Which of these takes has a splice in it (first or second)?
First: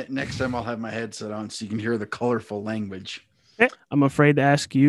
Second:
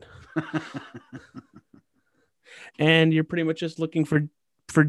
first